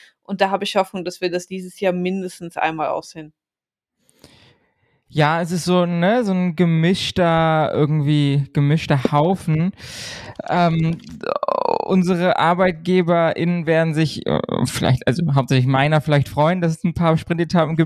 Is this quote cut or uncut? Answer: uncut